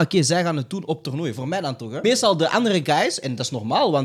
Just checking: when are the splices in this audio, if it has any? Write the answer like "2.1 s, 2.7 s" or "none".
2.0 s

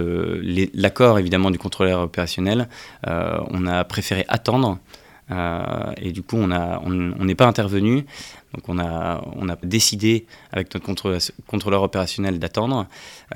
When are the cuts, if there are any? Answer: 8.4 s, 9.6 s

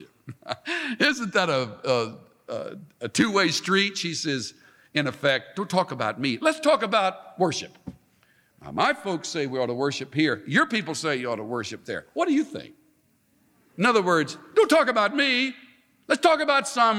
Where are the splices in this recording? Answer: none

